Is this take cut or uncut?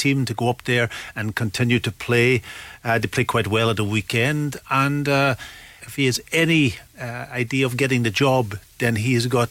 cut